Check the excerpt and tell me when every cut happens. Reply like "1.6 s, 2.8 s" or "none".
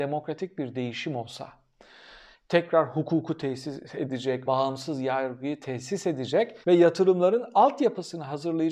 4.5 s, 6.6 s